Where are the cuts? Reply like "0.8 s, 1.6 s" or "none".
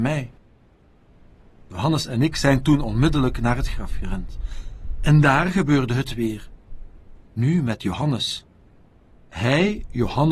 none